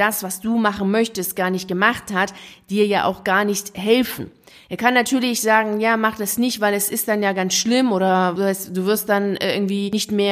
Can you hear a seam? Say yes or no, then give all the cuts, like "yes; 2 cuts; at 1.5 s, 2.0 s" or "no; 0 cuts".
no; 0 cuts